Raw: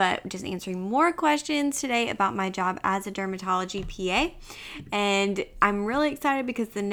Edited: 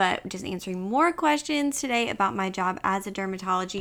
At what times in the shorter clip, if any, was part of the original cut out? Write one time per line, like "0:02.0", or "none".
none